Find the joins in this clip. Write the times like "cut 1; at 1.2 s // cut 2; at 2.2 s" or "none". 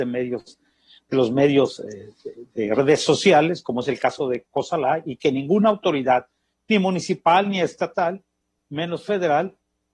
none

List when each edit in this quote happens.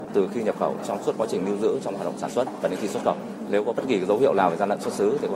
none

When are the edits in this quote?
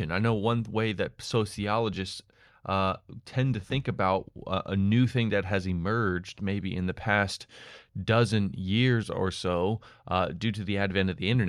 none

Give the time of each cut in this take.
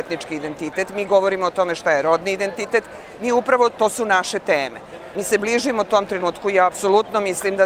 cut 1; at 5.1 s

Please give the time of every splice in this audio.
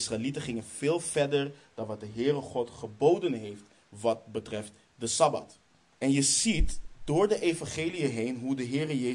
cut 1; at 5.9 s

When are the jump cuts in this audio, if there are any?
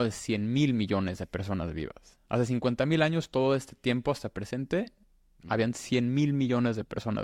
none

